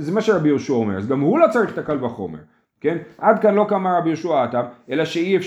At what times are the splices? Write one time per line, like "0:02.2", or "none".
none